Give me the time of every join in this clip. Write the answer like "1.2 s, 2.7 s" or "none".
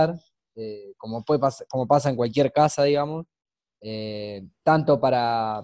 none